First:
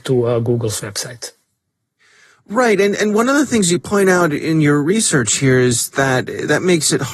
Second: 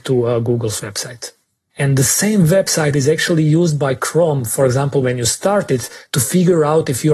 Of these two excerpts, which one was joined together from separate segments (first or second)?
second